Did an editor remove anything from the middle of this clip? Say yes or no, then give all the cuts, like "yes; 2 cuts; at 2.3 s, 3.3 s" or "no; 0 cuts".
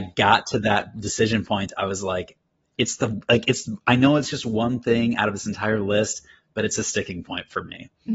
yes; 1 cut; at 2.6 s